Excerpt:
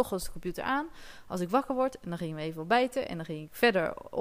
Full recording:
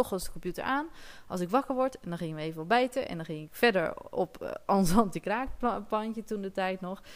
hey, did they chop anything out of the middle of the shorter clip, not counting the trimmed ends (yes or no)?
no